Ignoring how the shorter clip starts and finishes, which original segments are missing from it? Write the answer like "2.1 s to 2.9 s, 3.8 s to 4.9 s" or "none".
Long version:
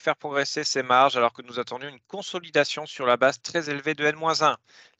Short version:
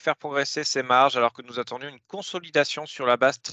none

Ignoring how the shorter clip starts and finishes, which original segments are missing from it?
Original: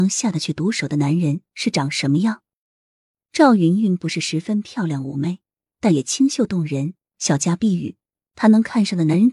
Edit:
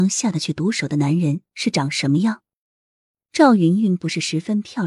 none

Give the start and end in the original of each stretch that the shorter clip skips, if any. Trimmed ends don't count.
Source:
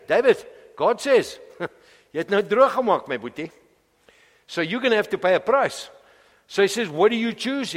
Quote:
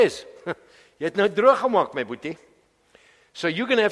none

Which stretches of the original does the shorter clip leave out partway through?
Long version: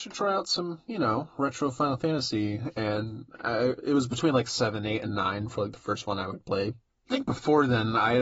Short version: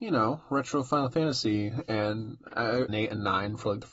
3.8 s to 4.8 s

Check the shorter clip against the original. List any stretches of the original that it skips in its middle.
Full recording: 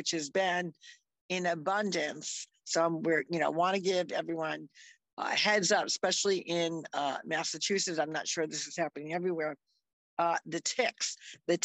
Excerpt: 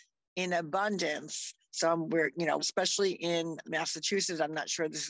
3.5 s to 5.9 s, 6.9 s to 7.2 s

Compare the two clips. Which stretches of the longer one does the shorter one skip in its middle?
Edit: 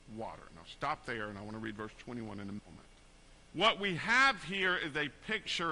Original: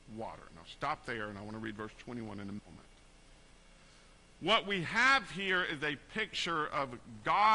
3.4 s to 4.3 s

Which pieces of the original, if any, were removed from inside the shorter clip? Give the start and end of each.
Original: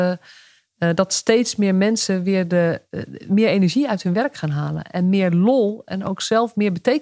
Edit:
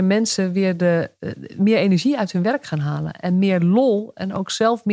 none

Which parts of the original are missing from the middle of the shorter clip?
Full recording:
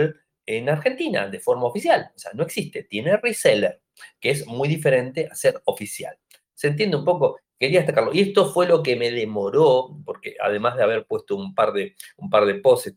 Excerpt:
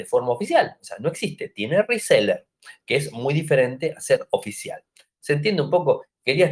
none

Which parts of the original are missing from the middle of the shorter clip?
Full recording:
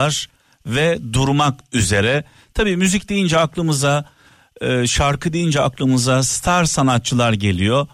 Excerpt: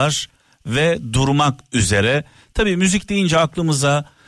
none

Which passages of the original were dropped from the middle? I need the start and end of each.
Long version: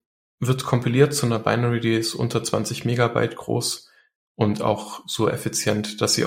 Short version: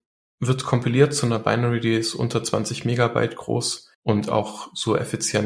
3.9 s to 4.3 s

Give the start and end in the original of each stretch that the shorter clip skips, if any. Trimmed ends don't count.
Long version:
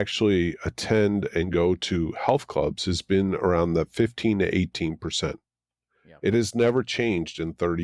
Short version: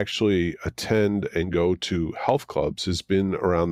none

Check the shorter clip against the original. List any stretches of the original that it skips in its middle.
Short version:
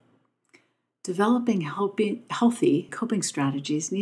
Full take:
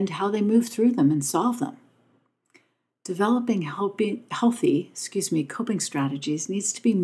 4.9 s to 5.5 s

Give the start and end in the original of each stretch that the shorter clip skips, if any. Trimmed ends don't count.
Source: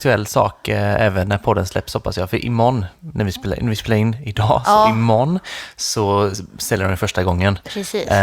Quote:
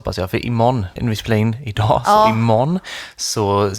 3.0 s to 3.6 s

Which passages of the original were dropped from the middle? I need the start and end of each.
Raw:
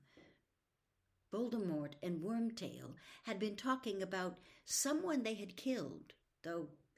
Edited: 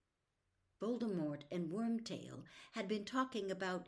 none

